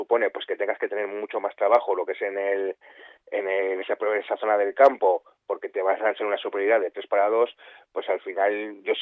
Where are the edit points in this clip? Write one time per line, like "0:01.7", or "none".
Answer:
none